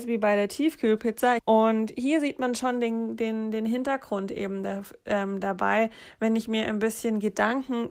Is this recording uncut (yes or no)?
no